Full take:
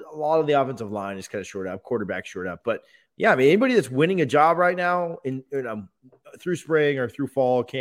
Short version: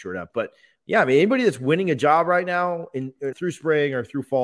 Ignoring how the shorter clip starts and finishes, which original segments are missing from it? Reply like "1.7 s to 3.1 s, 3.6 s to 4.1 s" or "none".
5.6 s to 6.4 s